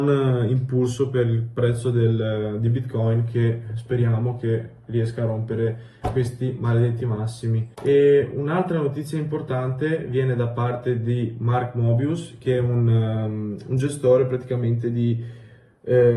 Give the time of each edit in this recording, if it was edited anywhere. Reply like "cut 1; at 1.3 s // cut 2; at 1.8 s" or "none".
cut 1; at 7.7 s